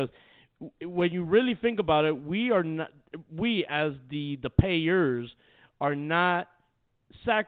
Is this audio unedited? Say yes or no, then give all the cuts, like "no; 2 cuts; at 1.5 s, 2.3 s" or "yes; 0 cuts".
yes; 0 cuts